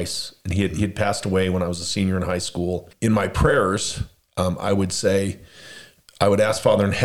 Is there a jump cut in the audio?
yes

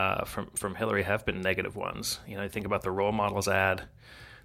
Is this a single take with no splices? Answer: yes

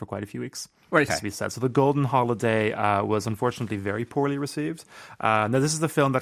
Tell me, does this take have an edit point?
yes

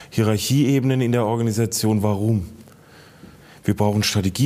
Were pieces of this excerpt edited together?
no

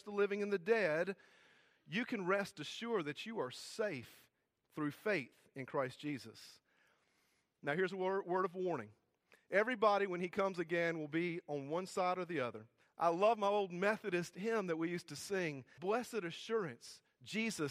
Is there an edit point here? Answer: yes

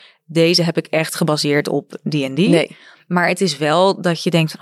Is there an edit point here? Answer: no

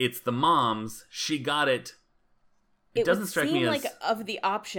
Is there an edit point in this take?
yes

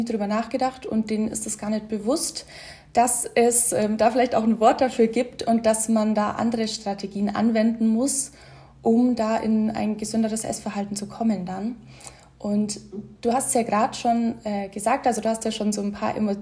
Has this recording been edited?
no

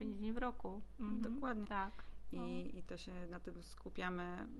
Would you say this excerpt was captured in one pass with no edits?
no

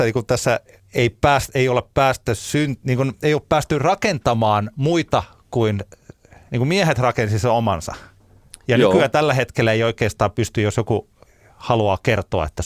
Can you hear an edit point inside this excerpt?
no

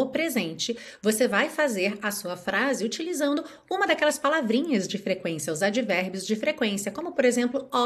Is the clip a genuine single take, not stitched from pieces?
yes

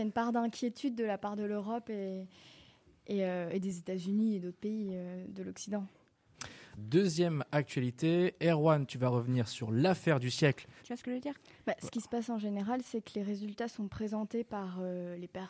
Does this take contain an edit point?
yes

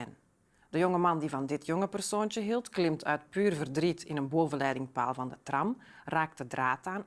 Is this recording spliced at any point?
no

